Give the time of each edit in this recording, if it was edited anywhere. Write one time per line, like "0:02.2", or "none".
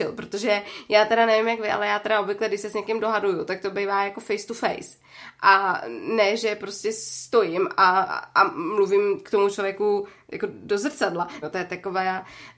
0:11.4